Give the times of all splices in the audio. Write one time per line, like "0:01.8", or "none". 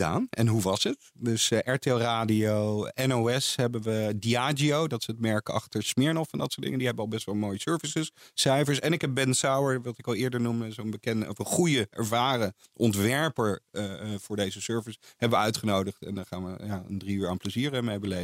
none